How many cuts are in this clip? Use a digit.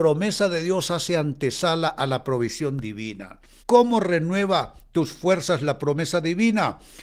1